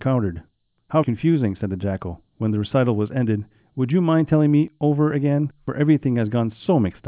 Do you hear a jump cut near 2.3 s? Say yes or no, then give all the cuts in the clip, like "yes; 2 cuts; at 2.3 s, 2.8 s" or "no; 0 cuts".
yes; 2 cuts; at 1.0 s, 2.3 s